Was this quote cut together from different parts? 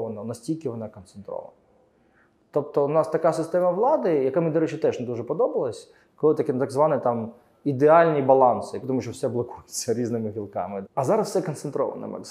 yes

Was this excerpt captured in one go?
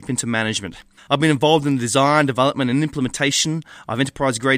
no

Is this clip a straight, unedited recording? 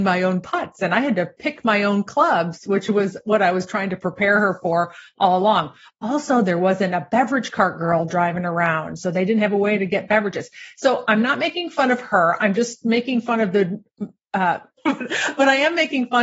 no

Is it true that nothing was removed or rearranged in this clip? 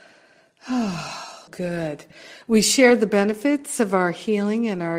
no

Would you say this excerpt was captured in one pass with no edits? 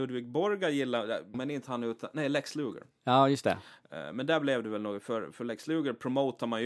no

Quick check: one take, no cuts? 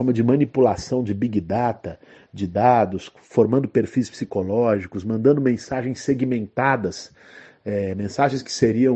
yes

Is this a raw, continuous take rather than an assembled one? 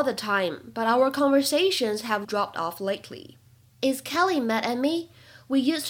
no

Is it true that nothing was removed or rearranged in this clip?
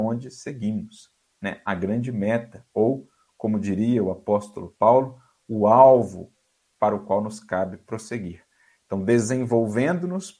yes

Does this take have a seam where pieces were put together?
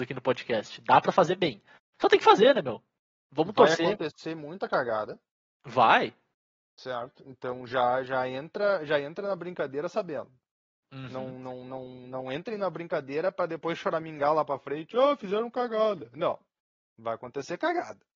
no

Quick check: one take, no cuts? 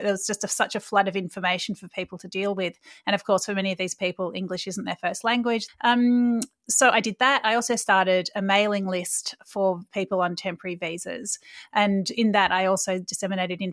no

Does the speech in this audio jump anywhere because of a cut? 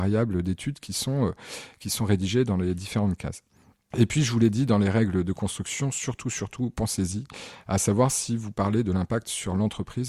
no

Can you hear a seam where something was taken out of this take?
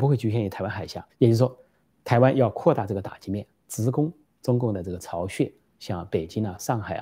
yes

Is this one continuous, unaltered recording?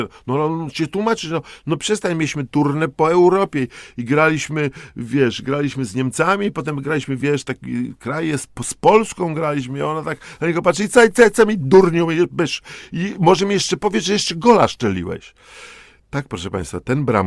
yes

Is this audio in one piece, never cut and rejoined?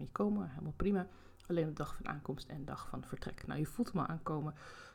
yes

